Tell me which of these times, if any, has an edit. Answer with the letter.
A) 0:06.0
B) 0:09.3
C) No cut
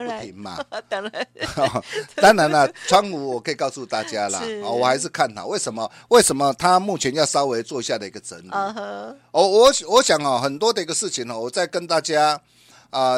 C